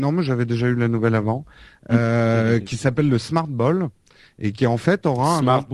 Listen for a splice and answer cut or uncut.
uncut